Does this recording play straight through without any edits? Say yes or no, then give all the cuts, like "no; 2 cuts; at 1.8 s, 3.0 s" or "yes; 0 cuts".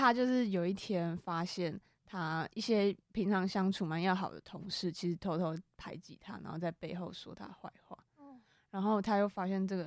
no; 1 cut; at 3.0 s